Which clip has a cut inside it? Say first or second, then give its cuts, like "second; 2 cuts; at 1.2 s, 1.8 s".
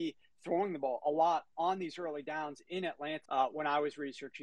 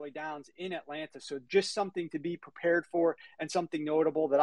first; 1 cut; at 3.2 s